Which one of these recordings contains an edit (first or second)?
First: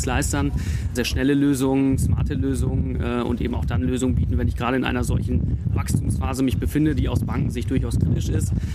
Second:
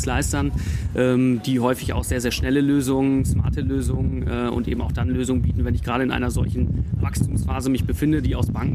first